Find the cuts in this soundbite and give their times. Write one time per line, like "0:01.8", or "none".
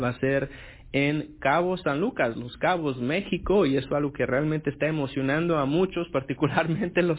none